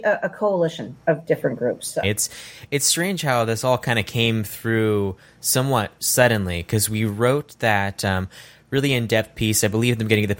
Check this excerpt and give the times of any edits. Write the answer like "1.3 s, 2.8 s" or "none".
2.0 s